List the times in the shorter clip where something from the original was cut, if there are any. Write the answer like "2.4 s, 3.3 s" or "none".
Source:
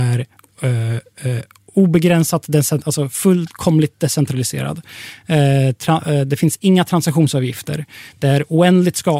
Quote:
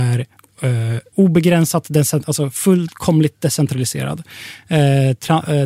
1.1 s